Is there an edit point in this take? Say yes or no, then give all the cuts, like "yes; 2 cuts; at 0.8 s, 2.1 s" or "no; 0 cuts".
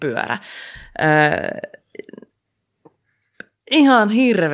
no; 0 cuts